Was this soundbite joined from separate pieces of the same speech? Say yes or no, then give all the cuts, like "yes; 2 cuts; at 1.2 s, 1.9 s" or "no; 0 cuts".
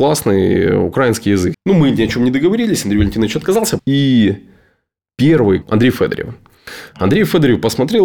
yes; 3 cuts; at 1.5 s, 3.8 s, 5.6 s